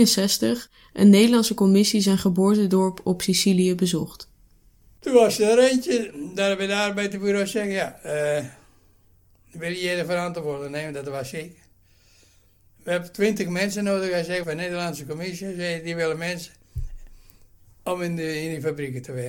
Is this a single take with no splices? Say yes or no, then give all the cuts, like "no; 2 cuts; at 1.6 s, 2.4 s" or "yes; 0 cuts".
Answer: no; 1 cut; at 14.4 s